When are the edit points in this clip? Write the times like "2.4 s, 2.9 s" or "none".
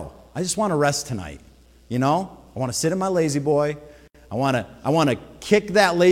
none

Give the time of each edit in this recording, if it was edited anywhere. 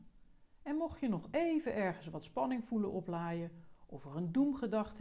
none

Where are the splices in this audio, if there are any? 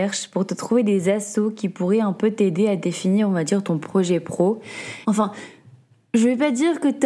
5.0 s

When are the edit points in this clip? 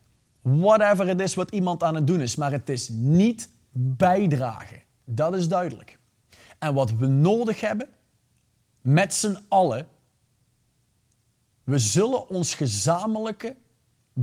none

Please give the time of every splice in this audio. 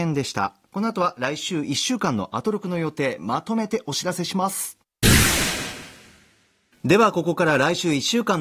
none

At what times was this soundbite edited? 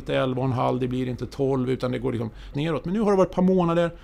2.5 s

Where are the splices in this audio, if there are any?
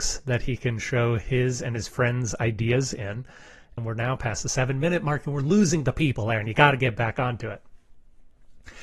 3.8 s

